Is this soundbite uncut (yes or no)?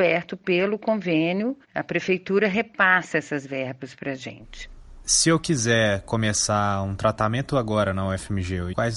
no